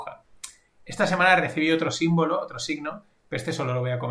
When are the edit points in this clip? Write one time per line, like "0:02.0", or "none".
none